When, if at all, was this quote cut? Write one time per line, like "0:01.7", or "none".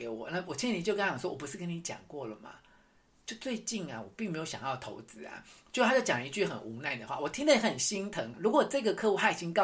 0:08.3